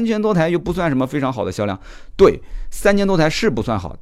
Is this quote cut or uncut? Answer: uncut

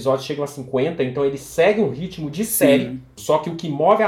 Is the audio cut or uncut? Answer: cut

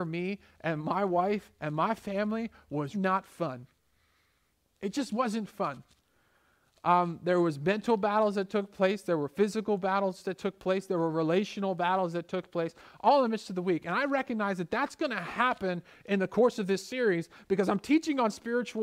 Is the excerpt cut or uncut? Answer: cut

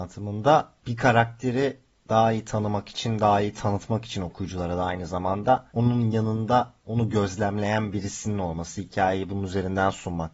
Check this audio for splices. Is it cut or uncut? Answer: cut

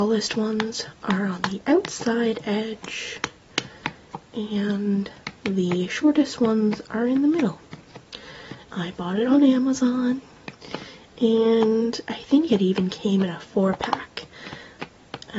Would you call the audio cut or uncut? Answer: cut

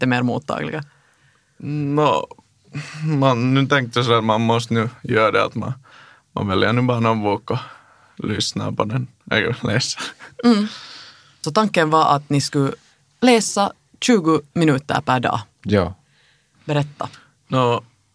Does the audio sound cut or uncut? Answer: uncut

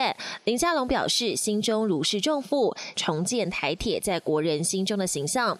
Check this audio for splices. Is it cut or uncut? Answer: cut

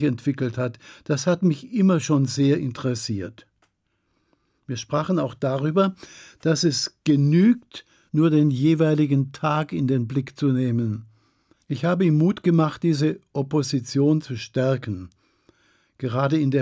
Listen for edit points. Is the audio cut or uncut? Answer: cut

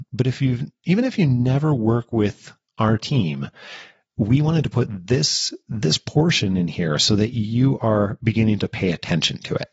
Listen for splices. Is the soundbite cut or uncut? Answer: uncut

